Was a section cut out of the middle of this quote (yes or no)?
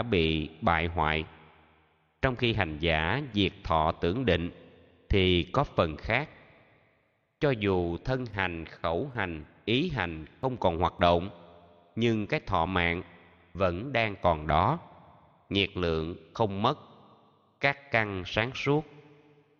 no